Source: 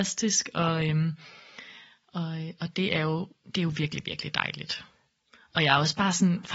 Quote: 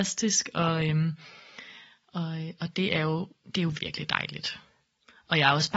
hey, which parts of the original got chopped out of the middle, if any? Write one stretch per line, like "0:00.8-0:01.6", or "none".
0:03.8-0:04.0